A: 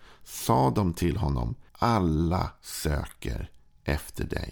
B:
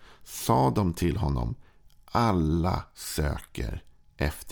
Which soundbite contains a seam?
A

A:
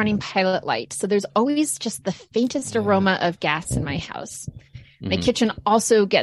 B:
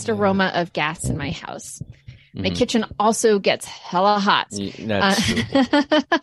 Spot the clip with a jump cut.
B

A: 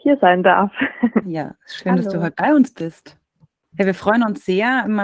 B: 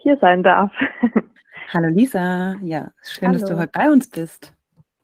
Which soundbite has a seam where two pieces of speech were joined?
A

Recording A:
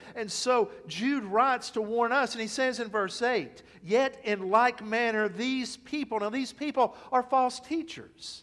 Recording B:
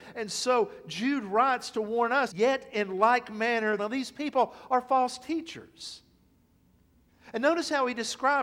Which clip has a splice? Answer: B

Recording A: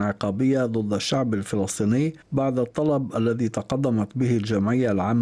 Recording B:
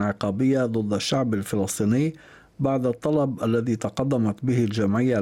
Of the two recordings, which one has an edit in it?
A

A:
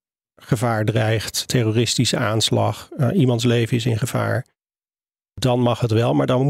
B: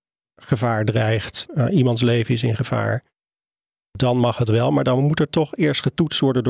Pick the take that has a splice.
B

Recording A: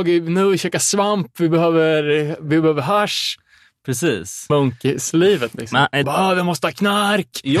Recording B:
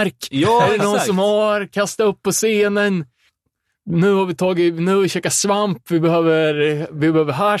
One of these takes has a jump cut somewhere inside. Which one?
A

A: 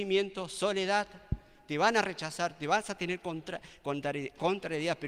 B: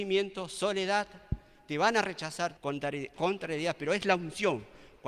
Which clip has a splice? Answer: B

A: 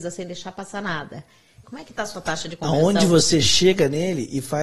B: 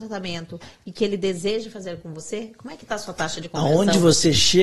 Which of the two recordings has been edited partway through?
A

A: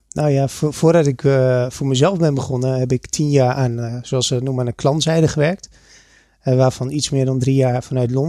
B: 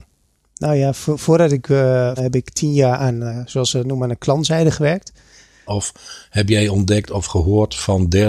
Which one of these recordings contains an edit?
B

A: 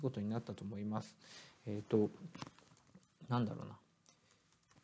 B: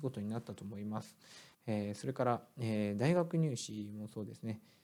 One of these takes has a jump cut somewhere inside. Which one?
B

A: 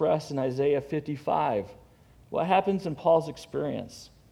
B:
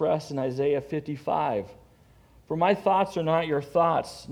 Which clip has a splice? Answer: A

